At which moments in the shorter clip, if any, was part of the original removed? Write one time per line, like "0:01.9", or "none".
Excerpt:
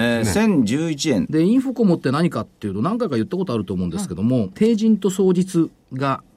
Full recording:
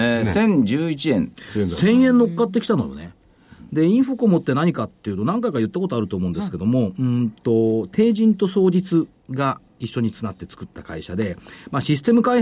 0:01.3
0:04.5